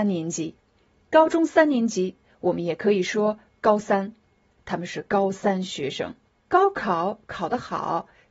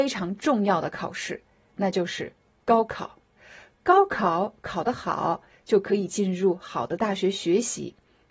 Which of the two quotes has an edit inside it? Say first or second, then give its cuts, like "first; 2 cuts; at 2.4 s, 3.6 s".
first; 1 cut; at 6.4 s